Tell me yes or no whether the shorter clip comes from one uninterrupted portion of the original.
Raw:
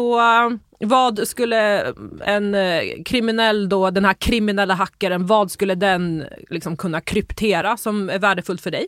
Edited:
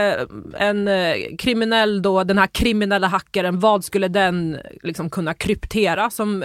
yes